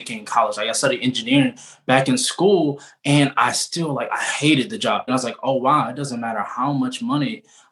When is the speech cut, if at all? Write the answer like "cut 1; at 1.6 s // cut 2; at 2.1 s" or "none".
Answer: cut 1; at 5.1 s